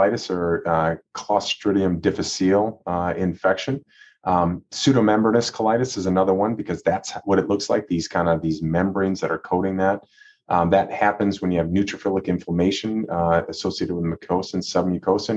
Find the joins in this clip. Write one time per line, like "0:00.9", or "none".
none